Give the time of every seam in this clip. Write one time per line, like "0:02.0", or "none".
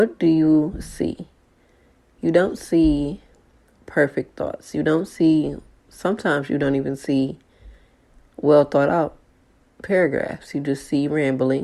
none